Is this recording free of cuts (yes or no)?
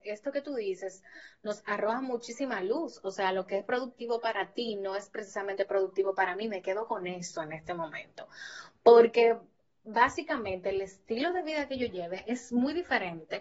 yes